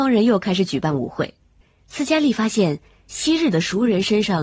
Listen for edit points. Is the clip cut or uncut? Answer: uncut